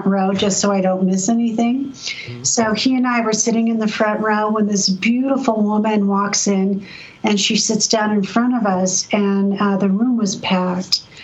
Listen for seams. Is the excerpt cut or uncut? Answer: uncut